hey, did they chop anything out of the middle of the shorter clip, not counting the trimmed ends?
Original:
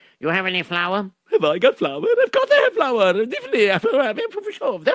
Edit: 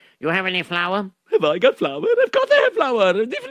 no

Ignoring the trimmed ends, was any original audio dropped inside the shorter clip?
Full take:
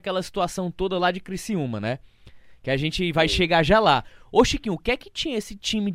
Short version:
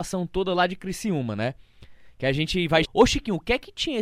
yes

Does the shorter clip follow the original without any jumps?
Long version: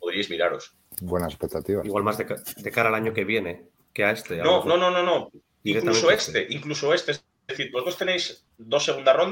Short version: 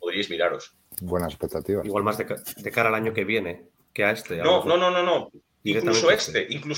yes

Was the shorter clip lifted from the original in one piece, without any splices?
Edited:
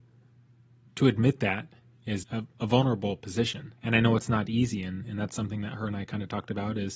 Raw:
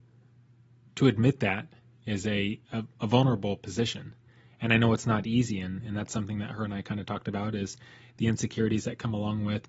no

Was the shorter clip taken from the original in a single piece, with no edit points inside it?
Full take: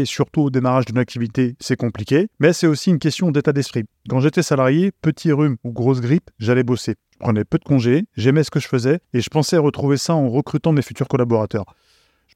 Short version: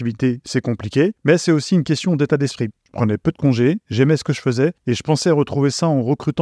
no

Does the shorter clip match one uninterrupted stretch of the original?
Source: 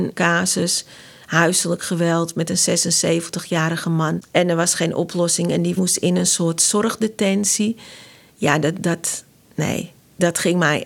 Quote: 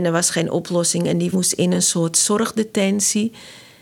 yes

